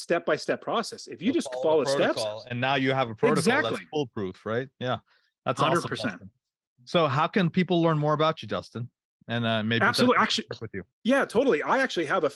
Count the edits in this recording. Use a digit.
1